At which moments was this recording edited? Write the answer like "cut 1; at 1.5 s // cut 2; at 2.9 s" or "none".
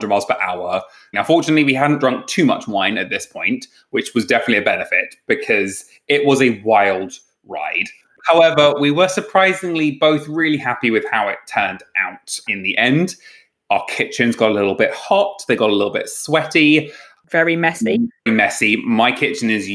cut 1; at 1.1 s // cut 2; at 12.5 s // cut 3; at 18.3 s